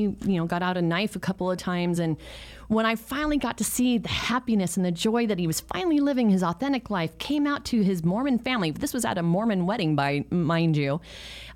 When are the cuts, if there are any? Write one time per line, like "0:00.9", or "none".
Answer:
none